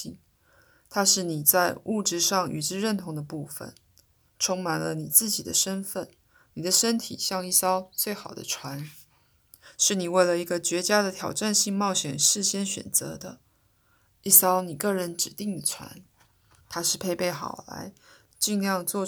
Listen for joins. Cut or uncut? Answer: uncut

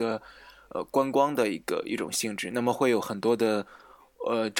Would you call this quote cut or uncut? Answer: uncut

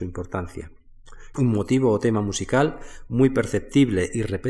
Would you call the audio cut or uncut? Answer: cut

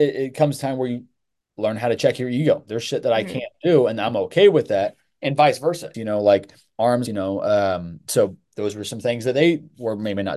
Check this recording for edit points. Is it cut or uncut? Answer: cut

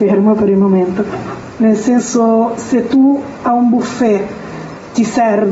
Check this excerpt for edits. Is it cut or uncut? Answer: cut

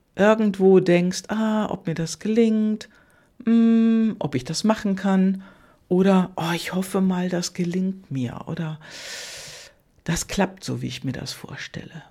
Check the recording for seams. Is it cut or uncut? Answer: uncut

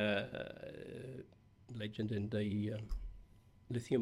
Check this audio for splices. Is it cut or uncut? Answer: uncut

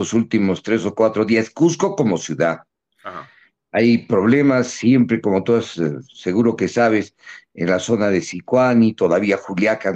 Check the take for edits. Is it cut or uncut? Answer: uncut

